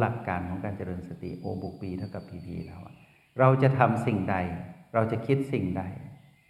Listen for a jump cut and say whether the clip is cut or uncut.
uncut